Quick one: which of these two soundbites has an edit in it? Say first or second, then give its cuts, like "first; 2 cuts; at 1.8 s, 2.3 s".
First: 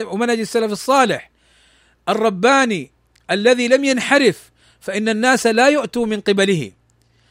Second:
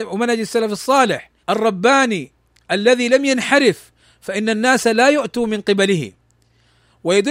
second; 1 cut; at 1.4 s